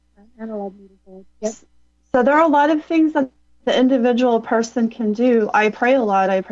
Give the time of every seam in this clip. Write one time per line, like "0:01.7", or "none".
none